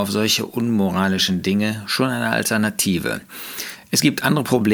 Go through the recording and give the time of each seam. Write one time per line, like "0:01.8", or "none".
none